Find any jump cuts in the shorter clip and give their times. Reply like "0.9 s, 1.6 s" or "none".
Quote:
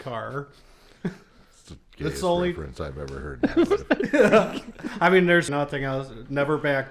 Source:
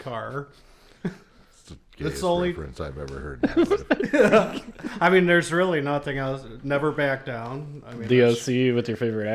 5.5 s